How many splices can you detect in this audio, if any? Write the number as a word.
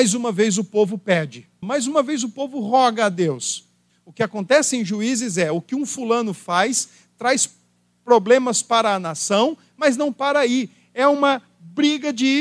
two